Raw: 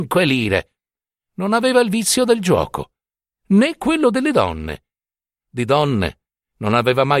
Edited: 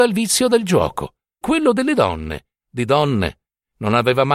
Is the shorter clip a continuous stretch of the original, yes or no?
no